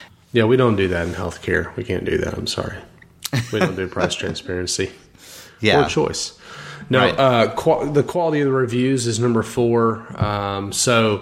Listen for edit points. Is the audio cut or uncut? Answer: uncut